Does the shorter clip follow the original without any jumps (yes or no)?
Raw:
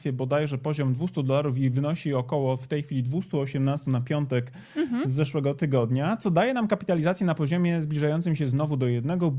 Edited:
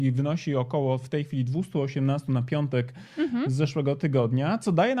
yes